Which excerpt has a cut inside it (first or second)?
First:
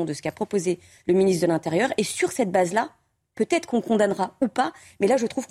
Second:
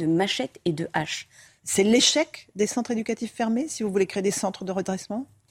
second